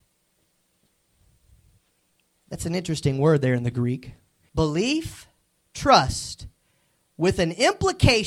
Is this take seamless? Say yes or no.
no